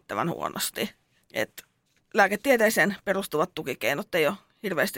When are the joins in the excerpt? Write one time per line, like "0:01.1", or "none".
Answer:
none